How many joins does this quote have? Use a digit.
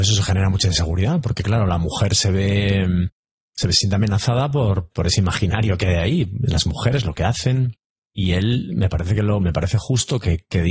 2